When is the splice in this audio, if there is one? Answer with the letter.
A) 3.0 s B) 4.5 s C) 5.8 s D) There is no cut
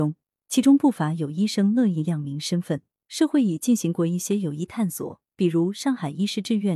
A